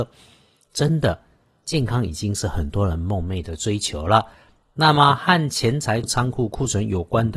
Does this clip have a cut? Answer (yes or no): yes